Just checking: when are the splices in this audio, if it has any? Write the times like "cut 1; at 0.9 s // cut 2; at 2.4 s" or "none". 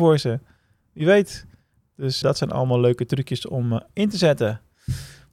cut 1; at 2.2 s